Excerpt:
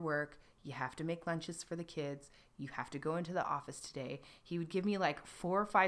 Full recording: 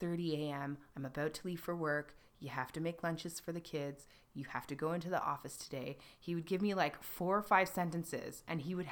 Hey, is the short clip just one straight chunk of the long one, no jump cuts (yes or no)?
yes